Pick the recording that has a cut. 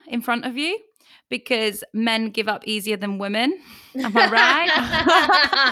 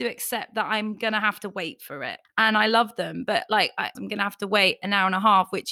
second; 2 cuts; at 2.2 s, 3.9 s

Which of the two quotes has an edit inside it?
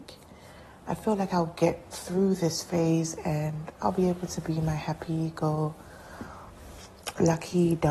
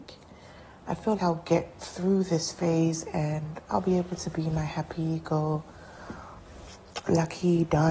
second; 1 cut; at 1.2 s

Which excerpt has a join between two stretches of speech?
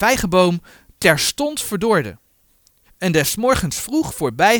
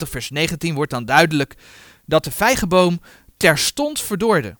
first; 1 cut; at 2.9 s

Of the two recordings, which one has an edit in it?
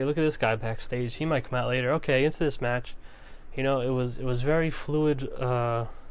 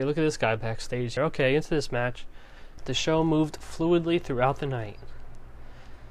second; 2 cuts; at 1.2 s, 2.8 s

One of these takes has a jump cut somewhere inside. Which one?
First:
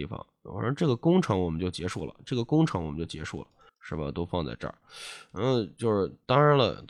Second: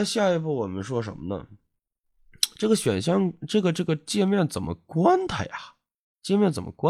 first; 1 cut; at 3.7 s

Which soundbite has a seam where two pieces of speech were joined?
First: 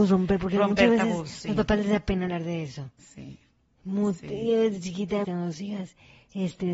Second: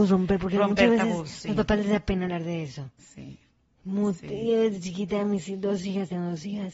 first; 1 cut; at 5.2 s

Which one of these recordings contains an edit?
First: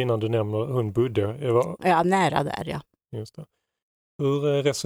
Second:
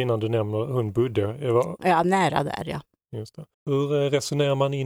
second; 1 cut; at 3.5 s

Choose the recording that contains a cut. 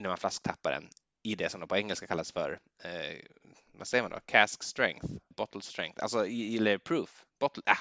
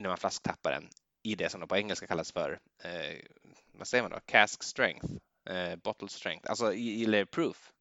first; 1 cut; at 5.3 s

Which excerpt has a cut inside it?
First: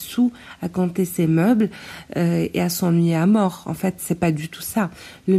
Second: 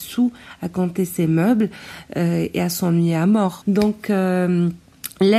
second; 1 cut; at 3.6 s

